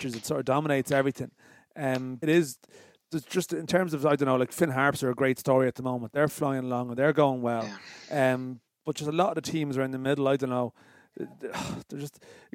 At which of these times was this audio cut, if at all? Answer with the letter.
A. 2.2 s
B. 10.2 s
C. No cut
A